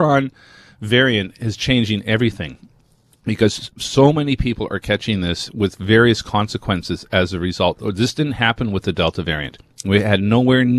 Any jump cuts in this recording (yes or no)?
no